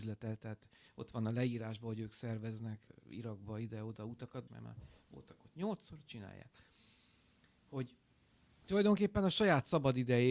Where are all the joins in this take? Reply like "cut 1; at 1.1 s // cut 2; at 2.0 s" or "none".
cut 1; at 2.9 s // cut 2; at 4.5 s

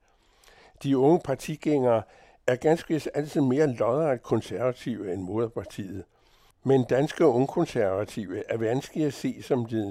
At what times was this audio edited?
none

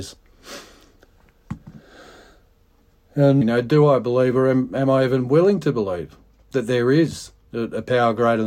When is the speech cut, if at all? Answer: cut 1; at 3.4 s

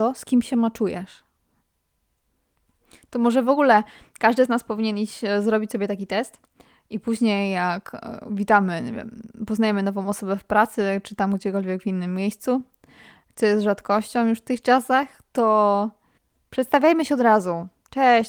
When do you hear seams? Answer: none

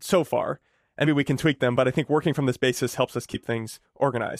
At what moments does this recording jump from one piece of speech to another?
cut 1; at 1.0 s

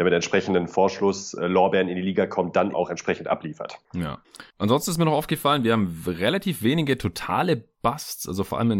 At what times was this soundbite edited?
cut 1; at 2.7 s

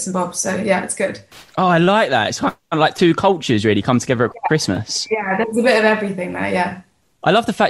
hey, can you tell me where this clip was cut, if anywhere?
none

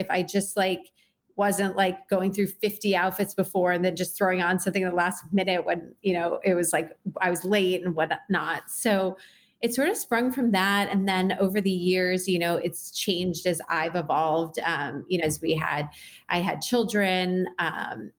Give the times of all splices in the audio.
cut 1; at 15.2 s

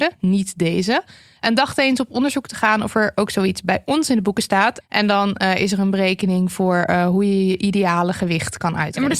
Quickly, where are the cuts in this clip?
cut 1; at 4.8 s

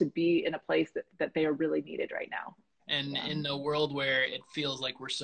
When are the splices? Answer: cut 1; at 2.8 s

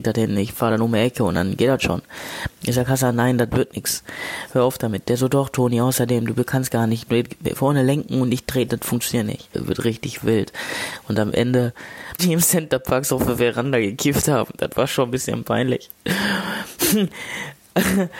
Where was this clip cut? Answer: cut 1; at 9.5 s // cut 2; at 12.2 s

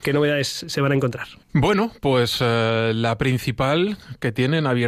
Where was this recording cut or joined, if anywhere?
cut 1; at 1.4 s

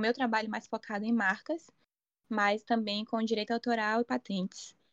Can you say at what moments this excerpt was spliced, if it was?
none

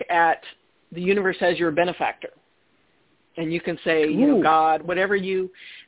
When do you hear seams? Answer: cut 1; at 4.8 s

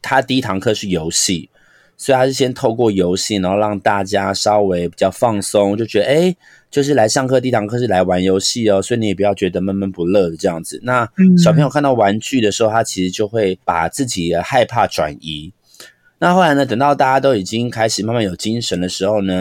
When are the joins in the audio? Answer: cut 1; at 13.6 s

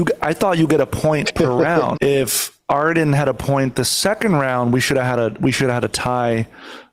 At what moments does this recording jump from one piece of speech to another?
cut 1; at 2.0 s

